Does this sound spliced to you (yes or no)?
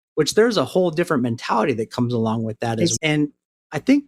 yes